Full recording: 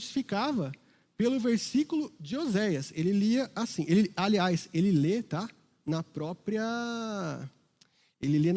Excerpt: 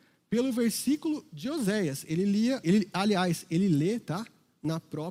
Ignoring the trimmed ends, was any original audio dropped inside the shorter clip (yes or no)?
yes